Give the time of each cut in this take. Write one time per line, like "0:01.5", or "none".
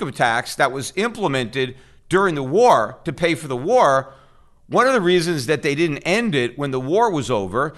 none